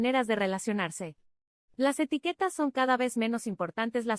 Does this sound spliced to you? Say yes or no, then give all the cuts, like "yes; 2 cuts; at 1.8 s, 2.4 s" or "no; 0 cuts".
yes; 1 cut; at 1.6 s